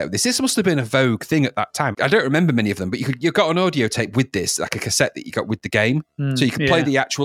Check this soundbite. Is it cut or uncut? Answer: cut